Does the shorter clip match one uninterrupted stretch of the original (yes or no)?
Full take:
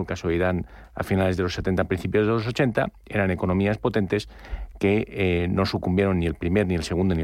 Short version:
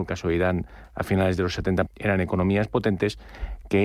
no